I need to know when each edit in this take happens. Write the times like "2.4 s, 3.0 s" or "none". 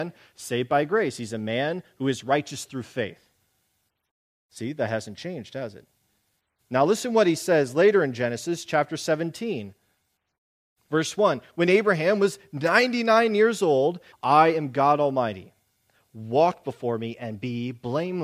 14.1 s